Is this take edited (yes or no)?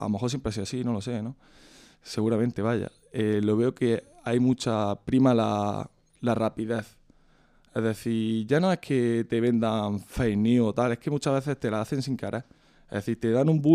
no